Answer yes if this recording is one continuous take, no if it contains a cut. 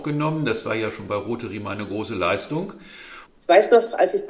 no